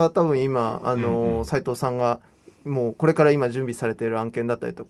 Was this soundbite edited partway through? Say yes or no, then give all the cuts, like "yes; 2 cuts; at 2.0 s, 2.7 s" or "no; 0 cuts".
no; 0 cuts